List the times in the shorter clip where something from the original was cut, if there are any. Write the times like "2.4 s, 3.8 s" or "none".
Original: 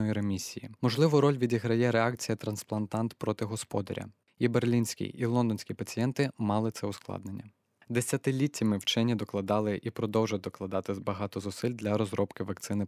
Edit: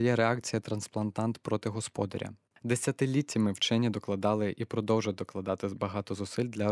2.5 s